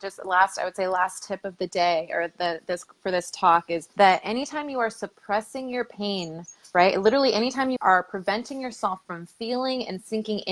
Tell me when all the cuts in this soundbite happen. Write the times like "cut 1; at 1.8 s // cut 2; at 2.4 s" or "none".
cut 1; at 3.9 s // cut 2; at 7.8 s